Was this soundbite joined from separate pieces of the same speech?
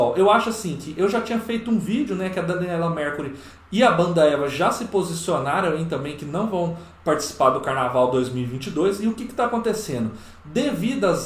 no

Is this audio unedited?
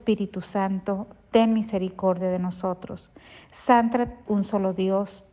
no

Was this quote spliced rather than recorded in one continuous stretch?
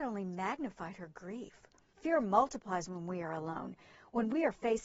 yes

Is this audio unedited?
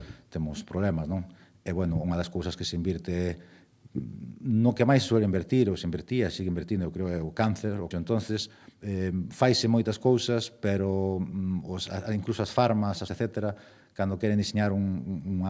no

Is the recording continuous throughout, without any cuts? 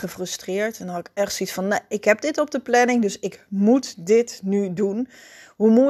yes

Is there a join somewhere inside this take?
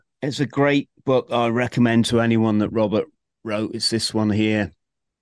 no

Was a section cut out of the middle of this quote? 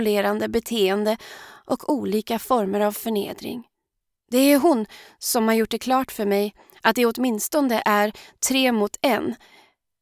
yes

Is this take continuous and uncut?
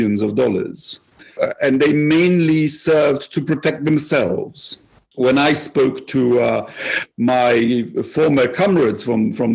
yes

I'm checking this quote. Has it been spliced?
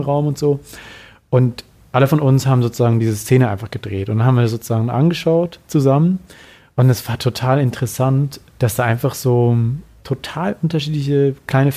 no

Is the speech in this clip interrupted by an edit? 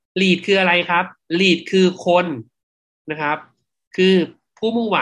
no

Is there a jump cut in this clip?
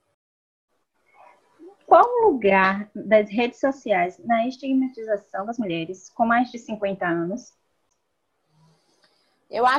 no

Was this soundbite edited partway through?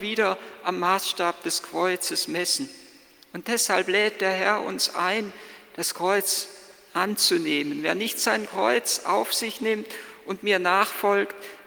no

